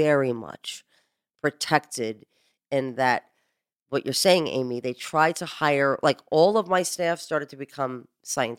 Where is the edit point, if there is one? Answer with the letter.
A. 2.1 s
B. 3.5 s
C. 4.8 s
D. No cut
D